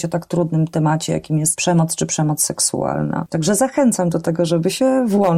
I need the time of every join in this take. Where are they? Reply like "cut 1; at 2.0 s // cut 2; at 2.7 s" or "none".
none